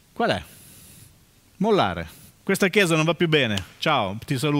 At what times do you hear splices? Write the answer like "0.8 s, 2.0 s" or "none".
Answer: 2.4 s